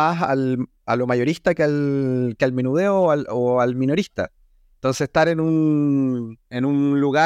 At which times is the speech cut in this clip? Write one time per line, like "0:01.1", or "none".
none